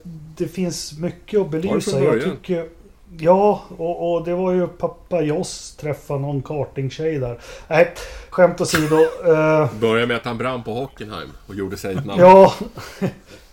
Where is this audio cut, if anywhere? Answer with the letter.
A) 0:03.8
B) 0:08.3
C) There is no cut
B